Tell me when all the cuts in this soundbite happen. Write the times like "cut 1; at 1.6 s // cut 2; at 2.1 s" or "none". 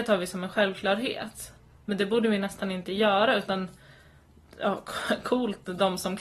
none